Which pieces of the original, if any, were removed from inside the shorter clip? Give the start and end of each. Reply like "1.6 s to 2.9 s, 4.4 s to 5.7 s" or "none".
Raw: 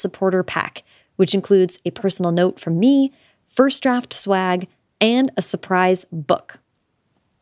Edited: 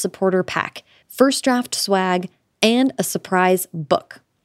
1.0 s to 3.4 s